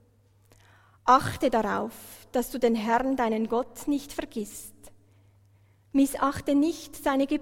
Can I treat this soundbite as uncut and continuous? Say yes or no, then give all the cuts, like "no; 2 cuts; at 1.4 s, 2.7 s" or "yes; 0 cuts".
yes; 0 cuts